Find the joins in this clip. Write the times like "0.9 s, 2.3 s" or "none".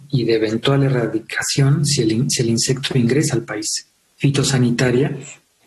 4.1 s